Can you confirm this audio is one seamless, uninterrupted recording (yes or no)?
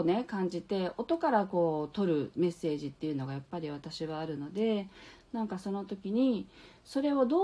yes